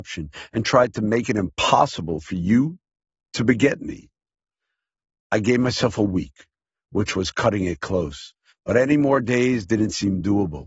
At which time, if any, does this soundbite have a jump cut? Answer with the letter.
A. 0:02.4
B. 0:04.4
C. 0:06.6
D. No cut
D